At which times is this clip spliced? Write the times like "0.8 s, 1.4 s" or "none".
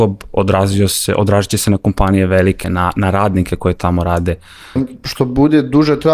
2.6 s, 4.8 s